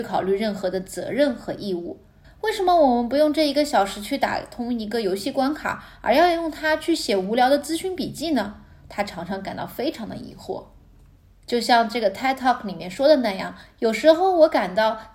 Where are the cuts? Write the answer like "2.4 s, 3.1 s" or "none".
2.2 s